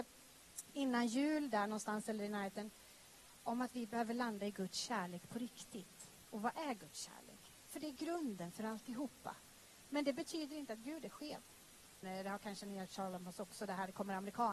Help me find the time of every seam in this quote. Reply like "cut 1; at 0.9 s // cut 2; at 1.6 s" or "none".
cut 1; at 9.9 s // cut 2; at 12.0 s

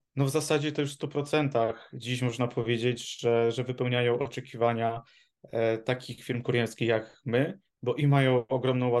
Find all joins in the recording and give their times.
none

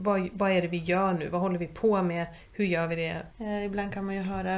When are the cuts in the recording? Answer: cut 1; at 3.3 s

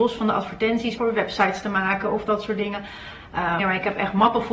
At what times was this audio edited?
cut 1; at 1.0 s // cut 2; at 3.6 s

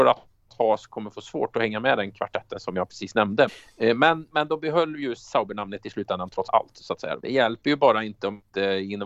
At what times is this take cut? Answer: cut 1; at 3.5 s // cut 2; at 7.2 s

